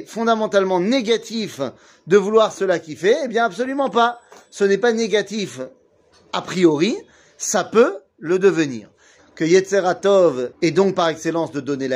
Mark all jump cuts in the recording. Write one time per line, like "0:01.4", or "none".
0:09.2
0:10.5